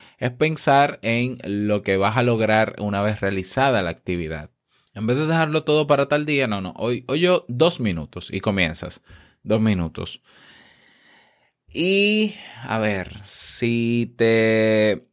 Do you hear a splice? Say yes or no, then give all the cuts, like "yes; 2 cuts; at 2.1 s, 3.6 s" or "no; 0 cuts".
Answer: yes; 1 cut; at 4.9 s